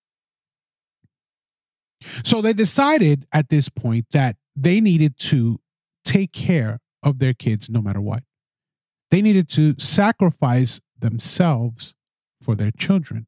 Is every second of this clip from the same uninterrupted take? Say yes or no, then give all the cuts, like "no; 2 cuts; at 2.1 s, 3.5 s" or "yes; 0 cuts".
yes; 0 cuts